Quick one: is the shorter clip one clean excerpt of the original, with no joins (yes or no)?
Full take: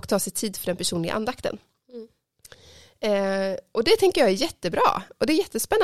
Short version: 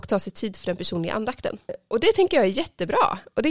no